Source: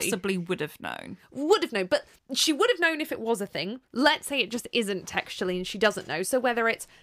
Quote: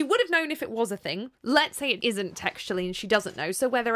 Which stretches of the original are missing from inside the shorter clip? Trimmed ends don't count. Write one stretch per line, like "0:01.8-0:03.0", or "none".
0:04.5-0:04.7